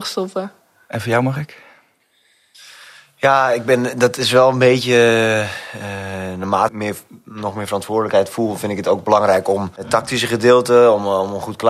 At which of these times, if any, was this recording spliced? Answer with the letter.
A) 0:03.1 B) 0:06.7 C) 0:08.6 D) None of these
B